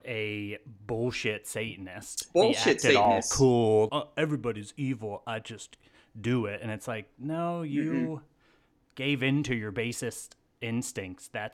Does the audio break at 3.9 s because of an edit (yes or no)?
yes